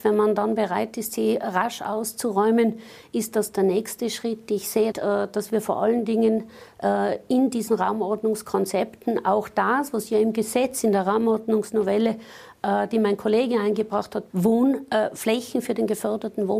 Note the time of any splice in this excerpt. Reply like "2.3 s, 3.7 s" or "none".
4.9 s, 14.3 s